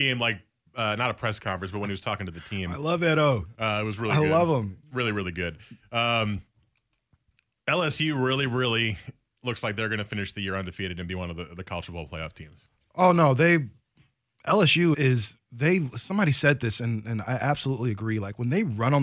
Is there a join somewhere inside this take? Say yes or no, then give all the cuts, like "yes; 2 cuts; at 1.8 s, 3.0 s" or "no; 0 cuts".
yes; 1 cut; at 14.9 s